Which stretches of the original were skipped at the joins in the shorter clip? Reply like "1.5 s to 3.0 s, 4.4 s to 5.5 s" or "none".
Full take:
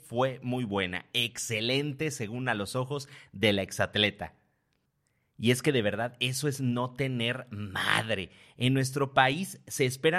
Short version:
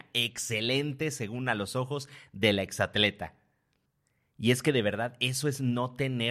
none